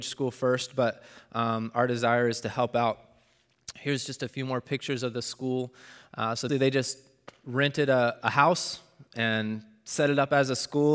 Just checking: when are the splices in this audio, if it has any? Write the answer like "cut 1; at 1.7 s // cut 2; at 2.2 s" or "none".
cut 1; at 6.5 s